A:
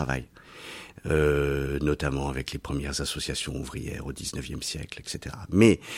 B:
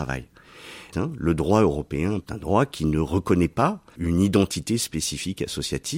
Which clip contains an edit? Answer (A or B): B